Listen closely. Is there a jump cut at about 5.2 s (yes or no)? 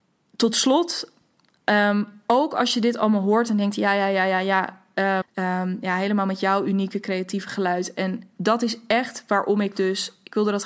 yes